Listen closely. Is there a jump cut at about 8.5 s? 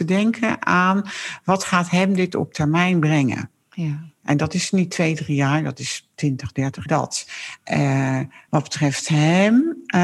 yes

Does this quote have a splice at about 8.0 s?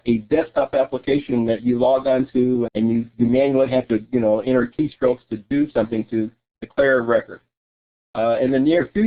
no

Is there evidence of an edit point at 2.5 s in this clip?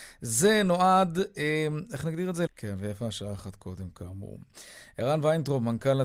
yes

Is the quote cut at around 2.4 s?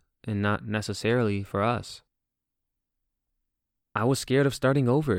no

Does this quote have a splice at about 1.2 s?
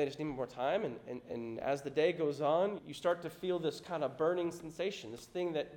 yes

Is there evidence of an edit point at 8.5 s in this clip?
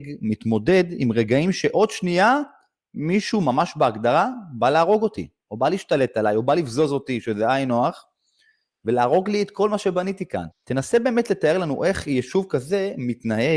no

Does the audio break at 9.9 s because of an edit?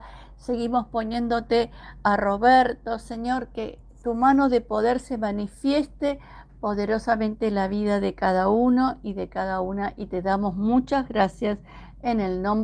no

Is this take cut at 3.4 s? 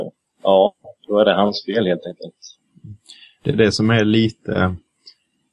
no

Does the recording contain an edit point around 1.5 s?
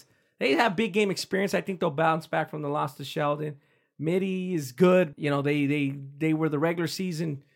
no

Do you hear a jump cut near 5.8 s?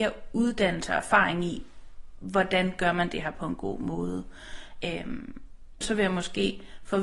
yes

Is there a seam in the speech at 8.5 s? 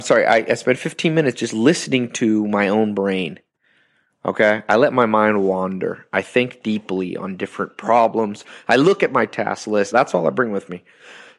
no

